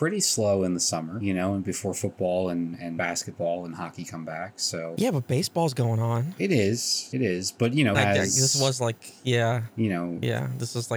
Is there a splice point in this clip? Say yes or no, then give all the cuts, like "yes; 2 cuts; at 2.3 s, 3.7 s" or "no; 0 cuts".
yes; 1 cut; at 7.9 s